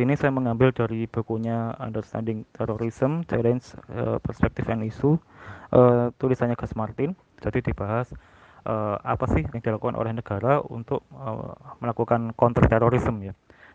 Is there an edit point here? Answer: yes; 2 cuts; at 7.4 s, 9.5 s

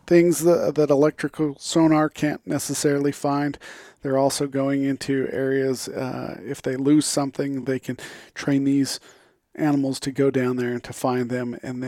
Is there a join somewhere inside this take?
no; 0 cuts

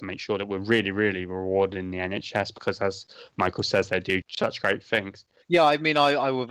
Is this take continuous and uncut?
no; 2 cuts; at 4.2 s, 5.4 s

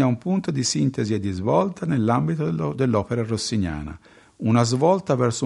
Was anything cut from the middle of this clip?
no; 0 cuts

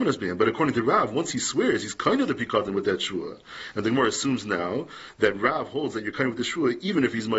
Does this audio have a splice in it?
no; 0 cuts

